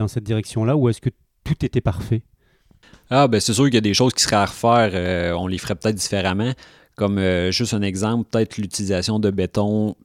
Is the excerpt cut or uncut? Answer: uncut